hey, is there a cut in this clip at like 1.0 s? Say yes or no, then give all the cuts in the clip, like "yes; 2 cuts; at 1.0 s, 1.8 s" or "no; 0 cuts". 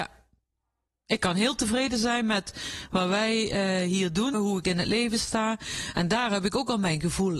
no; 2 cuts; at 4.3 s, 5.9 s